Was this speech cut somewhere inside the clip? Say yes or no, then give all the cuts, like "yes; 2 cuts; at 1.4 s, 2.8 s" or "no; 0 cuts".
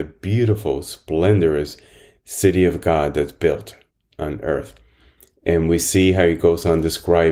yes; 1 cut; at 4.1 s